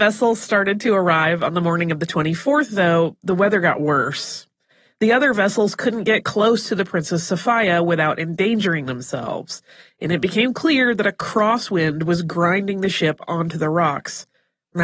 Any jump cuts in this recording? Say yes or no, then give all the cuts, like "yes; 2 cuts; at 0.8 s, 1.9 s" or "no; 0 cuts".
no; 0 cuts